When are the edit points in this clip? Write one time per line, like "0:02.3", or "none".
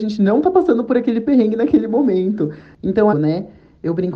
0:03.1